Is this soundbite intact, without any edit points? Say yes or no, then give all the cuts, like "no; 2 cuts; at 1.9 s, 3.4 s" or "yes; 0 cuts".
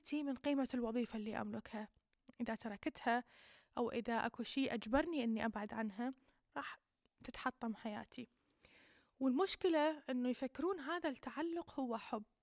yes; 0 cuts